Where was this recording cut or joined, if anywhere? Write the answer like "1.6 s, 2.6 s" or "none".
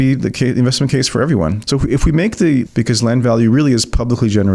1.6 s, 2.7 s